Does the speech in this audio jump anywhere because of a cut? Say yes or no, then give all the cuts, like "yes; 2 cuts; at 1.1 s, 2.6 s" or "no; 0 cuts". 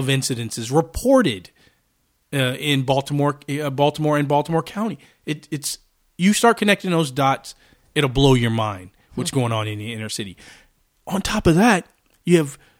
no; 0 cuts